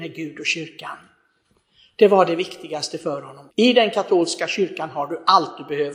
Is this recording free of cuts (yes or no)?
no